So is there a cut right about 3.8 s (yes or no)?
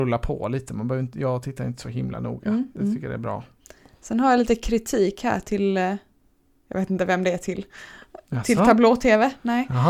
no